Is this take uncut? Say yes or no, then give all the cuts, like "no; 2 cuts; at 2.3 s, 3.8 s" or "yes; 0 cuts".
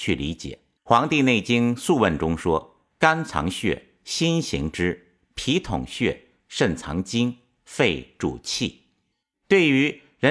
yes; 0 cuts